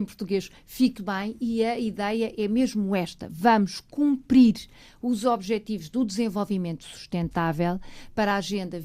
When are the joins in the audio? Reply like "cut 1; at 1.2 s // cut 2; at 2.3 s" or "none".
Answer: cut 1; at 1.0 s